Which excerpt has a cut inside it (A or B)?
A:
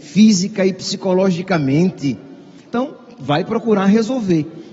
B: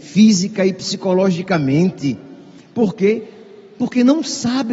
A